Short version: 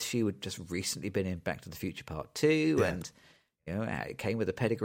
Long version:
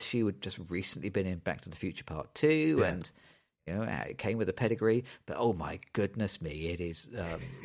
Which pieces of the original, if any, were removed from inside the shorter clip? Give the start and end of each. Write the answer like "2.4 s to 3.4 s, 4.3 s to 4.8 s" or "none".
none